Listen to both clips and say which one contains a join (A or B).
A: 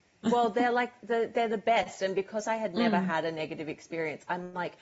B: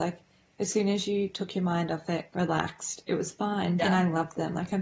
B